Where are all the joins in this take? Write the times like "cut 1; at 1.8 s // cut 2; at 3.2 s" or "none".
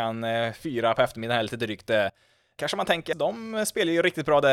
cut 1; at 3.1 s